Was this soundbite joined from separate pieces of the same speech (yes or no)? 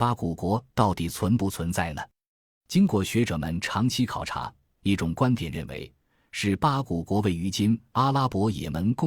no